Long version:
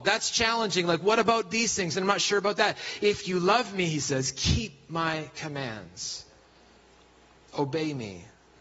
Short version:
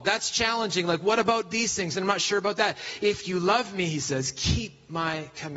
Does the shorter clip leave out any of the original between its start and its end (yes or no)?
no